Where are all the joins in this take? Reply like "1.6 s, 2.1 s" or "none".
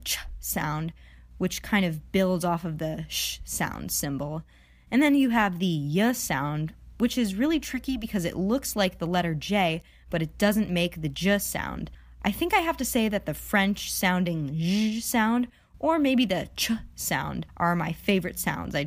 none